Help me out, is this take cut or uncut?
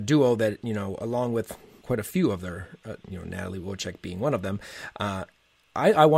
cut